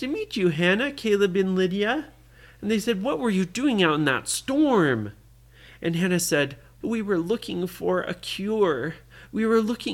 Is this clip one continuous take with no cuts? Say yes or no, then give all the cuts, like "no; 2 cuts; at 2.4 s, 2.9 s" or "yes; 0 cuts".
no; 1 cut; at 6.8 s